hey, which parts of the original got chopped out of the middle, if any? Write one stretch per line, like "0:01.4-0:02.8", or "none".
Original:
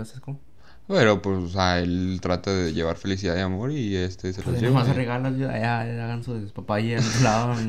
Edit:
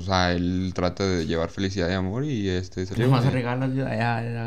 0:04.4-0:04.6